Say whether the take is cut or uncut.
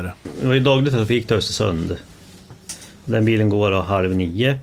uncut